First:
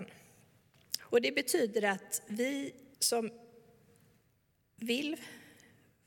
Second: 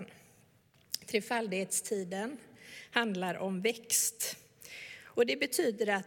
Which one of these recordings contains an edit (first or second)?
first